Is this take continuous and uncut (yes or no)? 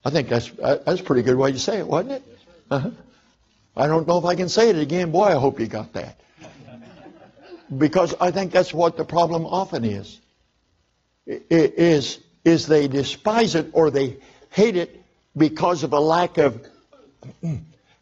no